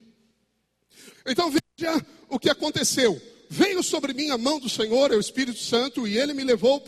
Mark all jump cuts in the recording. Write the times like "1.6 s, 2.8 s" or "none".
1.1 s